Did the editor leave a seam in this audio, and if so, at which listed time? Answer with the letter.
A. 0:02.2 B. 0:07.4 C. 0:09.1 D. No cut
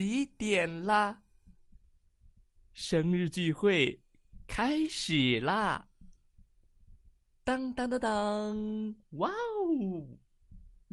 B